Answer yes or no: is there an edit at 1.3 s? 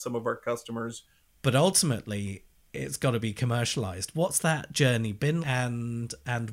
yes